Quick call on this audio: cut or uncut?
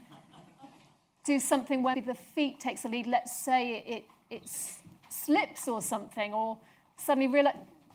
cut